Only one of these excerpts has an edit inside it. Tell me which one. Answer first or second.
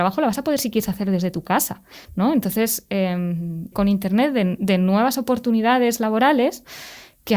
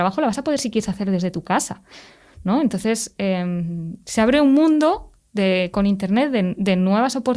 first